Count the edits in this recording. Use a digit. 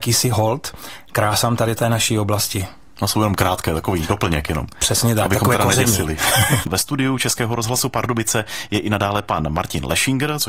1